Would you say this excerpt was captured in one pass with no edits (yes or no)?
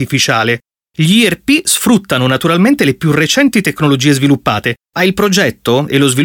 yes